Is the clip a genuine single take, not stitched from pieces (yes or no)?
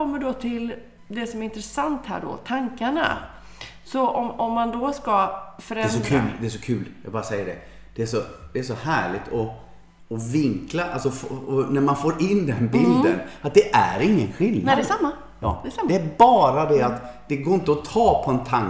yes